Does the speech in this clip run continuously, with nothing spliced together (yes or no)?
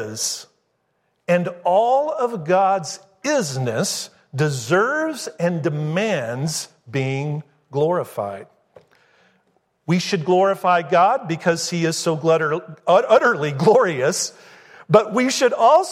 yes